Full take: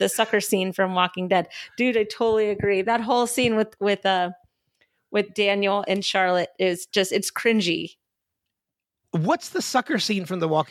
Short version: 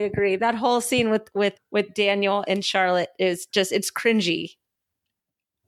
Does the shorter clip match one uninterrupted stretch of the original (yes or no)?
no